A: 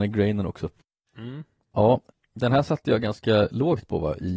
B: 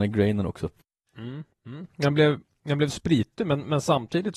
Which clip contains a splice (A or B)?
B